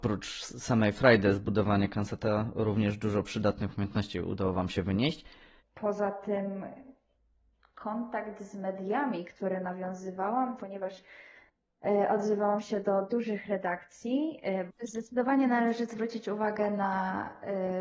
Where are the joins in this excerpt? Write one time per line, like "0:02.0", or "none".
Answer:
0:05.6
0:10.6
0:14.7